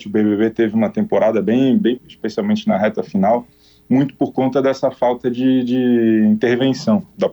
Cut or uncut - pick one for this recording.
cut